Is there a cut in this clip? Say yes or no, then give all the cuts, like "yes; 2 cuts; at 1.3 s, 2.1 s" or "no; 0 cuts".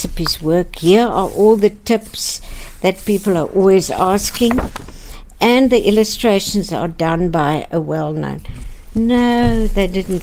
no; 0 cuts